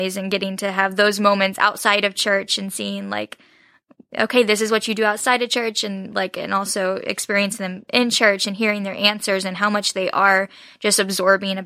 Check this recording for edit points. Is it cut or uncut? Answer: uncut